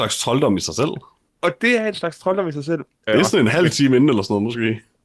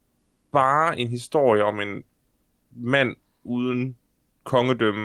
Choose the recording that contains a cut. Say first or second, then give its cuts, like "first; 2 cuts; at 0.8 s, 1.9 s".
first; 1 cut; at 3.1 s